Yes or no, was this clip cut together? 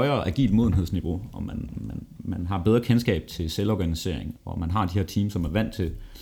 yes